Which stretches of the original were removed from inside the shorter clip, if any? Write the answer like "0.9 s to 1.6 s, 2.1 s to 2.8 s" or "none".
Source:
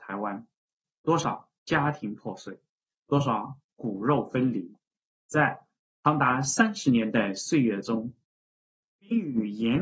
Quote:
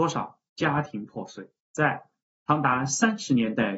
2.7 s to 5.2 s